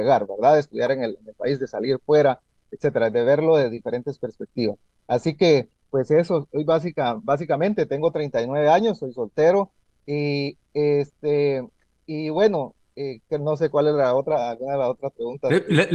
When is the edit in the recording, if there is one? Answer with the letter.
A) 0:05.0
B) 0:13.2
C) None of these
C